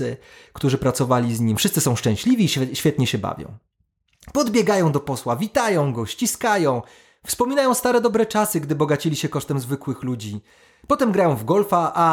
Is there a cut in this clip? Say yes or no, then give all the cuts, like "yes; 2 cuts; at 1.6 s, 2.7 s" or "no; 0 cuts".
no; 0 cuts